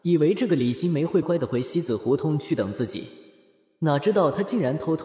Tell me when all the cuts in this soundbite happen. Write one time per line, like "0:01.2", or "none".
0:01.2